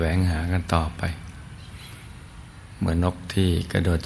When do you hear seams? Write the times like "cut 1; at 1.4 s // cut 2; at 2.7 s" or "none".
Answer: cut 1; at 3.0 s

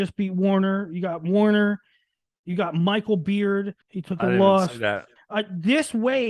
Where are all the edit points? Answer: cut 1; at 3.8 s // cut 2; at 5.2 s

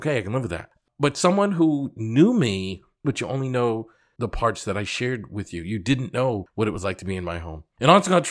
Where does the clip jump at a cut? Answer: cut 1; at 3.0 s

